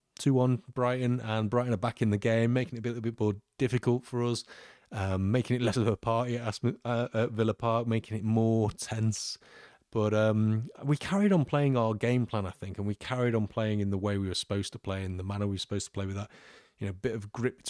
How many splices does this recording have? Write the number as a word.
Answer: zero